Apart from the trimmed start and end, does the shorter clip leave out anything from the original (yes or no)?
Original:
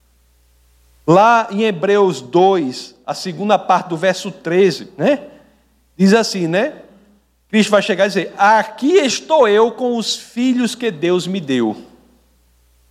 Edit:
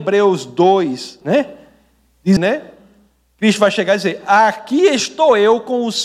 yes